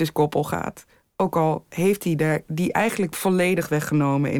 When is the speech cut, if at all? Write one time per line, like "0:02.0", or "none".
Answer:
none